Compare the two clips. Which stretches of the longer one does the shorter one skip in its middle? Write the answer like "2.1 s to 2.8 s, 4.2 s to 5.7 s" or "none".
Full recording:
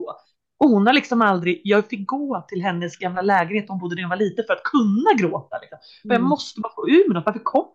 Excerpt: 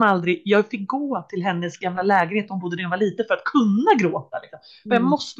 none